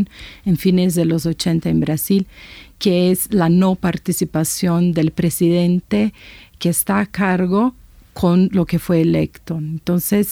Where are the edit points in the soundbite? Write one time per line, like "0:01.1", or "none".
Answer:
none